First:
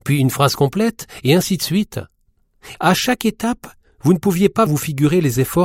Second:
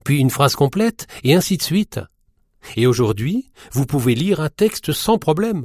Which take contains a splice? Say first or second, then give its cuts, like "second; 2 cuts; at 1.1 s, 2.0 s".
first; 2 cuts; at 2.7 s, 4.7 s